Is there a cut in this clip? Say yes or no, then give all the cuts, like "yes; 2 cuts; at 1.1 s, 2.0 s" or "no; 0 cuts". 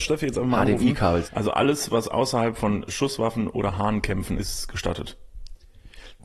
yes; 2 cuts; at 1.2 s, 4.4 s